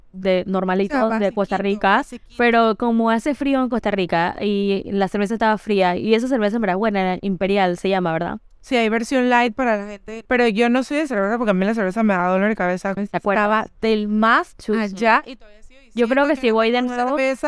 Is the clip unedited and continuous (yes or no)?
no